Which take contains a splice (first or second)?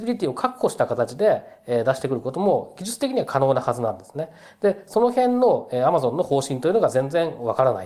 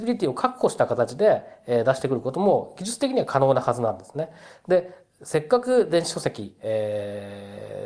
second